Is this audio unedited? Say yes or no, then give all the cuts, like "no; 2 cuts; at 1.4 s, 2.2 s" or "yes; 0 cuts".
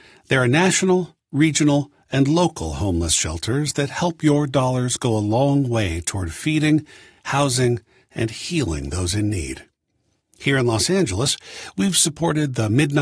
yes; 0 cuts